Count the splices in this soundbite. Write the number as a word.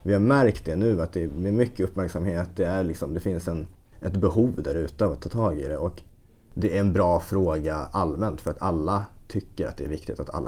zero